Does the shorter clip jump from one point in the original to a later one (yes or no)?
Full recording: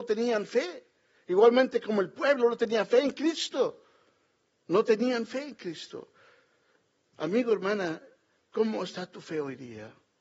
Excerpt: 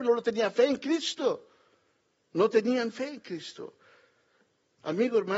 no